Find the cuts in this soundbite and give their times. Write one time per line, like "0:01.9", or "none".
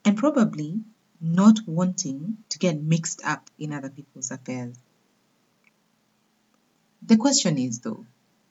0:02.4